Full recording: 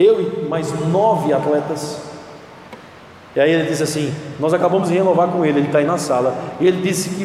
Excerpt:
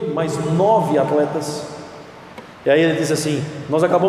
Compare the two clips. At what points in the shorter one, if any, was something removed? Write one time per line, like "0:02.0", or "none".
0:02.5